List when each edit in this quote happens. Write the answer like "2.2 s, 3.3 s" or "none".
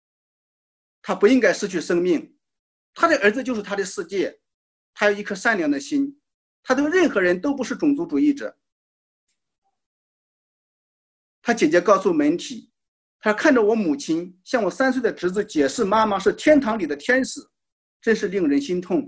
2.8 s